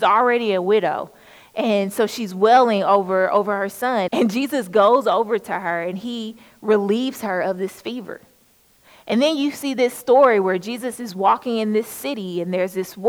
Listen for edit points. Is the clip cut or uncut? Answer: cut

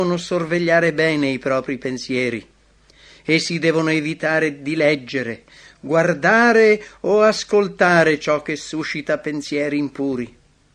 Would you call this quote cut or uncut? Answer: uncut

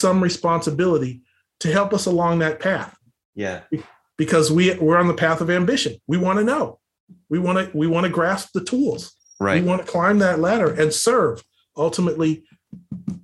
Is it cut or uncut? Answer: uncut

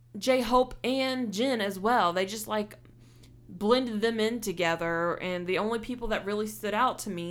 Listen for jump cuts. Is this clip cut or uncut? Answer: uncut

